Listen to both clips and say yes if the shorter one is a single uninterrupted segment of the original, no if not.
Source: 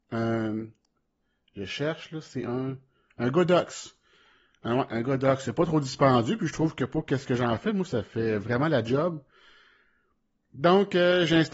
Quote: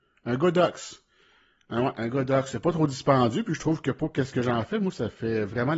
yes